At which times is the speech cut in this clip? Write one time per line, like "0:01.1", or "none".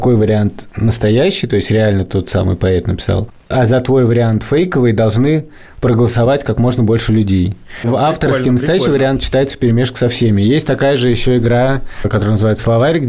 0:07.8